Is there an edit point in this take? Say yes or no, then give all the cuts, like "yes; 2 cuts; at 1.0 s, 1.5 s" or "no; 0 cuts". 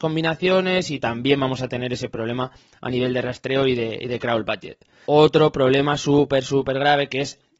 yes; 1 cut; at 5.0 s